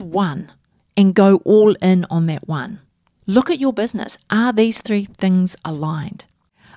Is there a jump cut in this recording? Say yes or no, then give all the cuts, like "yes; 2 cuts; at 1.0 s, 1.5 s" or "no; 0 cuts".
no; 0 cuts